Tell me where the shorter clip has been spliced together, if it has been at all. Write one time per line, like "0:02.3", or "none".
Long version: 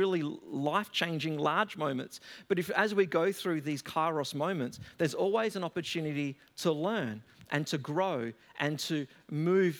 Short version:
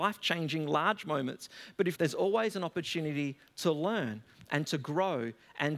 0:01.9